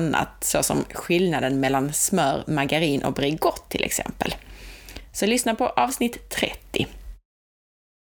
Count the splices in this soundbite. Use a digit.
0